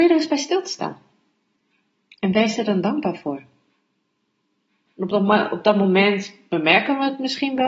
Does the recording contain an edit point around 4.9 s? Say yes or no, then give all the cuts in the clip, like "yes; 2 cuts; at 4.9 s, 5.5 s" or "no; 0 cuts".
yes; 1 cut; at 4.9 s